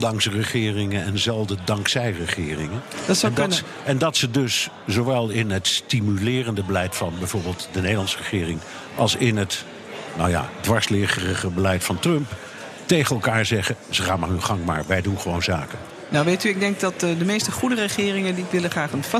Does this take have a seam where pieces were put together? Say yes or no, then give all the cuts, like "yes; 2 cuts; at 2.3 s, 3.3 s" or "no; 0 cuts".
no; 0 cuts